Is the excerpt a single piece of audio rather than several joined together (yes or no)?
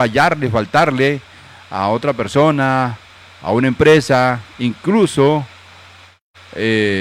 yes